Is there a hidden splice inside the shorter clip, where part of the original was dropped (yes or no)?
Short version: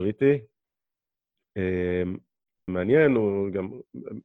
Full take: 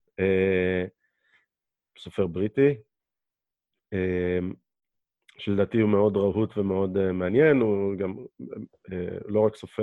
yes